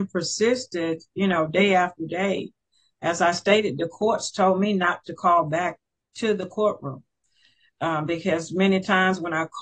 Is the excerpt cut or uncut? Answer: uncut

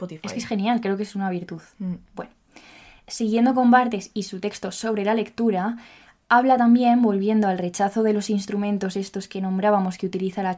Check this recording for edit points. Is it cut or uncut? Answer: uncut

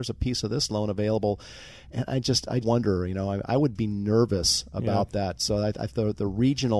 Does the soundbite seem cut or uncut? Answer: cut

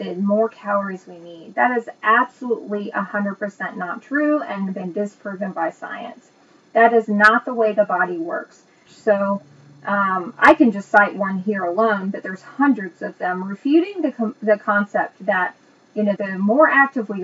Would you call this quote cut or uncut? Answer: cut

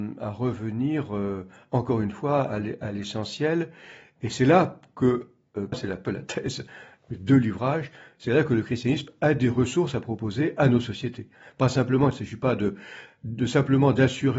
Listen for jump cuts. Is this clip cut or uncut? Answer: cut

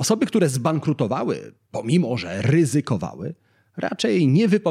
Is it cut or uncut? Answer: uncut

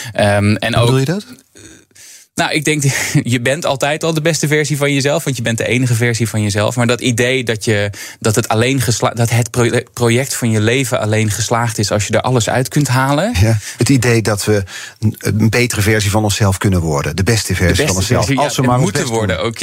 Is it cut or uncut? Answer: cut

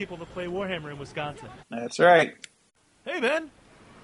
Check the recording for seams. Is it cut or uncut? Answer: cut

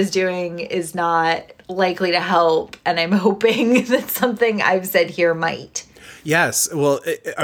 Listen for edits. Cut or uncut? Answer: uncut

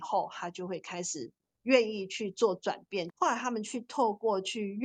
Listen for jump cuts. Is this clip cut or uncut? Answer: cut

